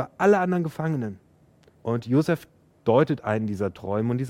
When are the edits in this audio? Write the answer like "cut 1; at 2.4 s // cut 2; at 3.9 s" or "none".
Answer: cut 1; at 1.7 s